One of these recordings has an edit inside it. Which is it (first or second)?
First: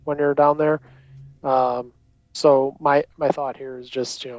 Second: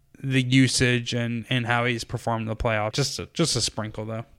second